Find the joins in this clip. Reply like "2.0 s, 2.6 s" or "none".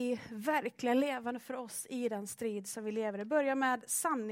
none